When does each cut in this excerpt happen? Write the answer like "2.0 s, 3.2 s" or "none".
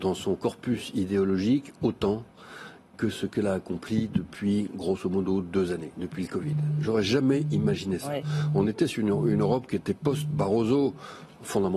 none